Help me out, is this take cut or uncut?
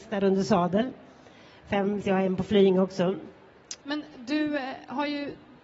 cut